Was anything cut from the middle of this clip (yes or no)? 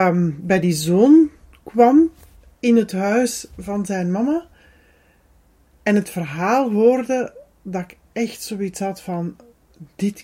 no